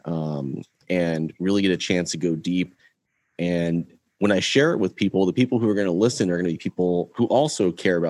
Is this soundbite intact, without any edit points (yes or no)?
yes